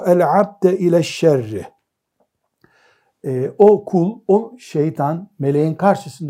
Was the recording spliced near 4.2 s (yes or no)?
no